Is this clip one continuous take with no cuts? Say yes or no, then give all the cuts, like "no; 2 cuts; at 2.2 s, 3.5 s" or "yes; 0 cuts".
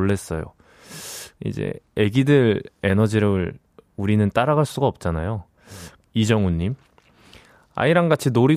no; 2 cuts; at 1.4 s, 6.0 s